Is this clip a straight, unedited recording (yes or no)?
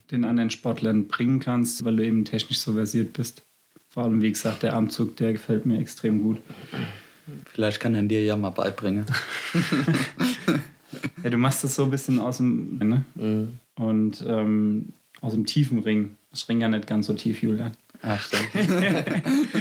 no